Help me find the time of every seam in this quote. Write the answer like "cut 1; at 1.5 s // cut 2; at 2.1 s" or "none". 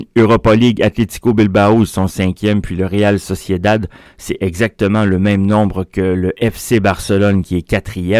cut 1; at 4.1 s